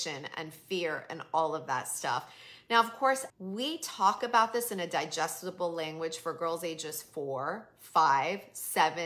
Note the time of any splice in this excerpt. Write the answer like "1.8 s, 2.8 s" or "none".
3.3 s